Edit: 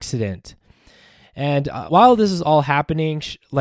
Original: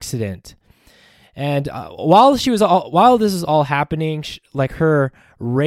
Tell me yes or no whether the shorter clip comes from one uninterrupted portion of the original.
no